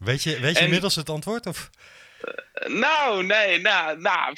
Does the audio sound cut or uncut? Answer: uncut